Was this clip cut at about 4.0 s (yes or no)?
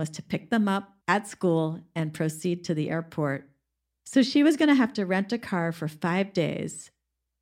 yes